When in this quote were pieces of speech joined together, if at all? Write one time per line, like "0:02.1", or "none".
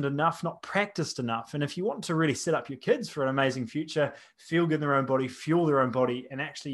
none